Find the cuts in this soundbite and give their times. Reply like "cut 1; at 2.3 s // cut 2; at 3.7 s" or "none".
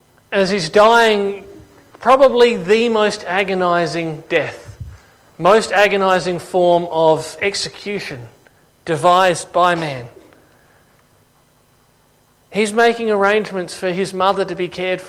none